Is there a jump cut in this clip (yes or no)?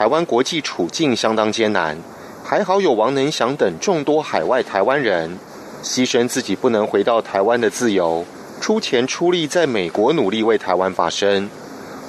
no